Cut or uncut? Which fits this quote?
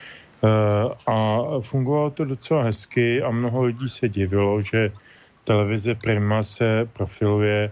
uncut